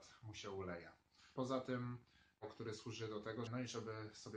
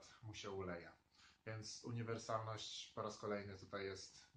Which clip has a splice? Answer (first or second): first